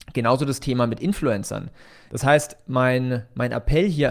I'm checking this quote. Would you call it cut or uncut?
cut